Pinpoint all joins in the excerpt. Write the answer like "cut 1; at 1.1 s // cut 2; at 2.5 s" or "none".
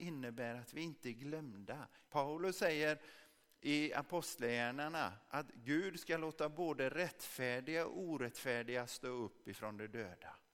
cut 1; at 2.1 s